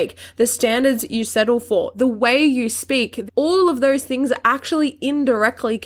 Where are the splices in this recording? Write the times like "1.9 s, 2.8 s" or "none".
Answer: 3.3 s